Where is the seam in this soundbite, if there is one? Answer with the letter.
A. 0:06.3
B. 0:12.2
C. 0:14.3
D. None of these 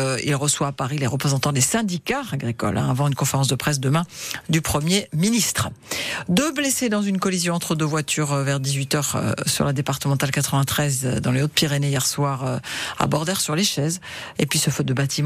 C